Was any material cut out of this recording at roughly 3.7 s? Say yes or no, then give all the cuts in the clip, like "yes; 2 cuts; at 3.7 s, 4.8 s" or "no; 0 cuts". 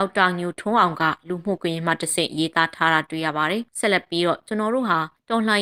yes; 1 cut; at 3.7 s